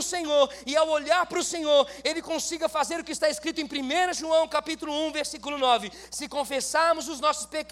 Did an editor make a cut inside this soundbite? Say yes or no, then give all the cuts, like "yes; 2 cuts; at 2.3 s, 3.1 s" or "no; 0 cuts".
no; 0 cuts